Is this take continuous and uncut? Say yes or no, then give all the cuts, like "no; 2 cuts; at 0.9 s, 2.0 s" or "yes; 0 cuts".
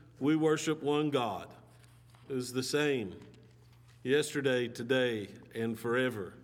yes; 0 cuts